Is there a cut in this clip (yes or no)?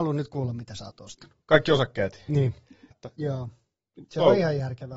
yes